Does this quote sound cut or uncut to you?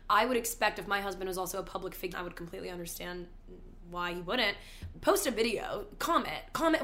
cut